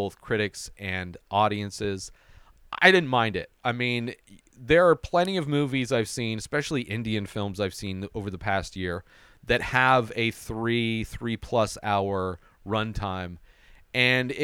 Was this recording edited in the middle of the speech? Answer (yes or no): no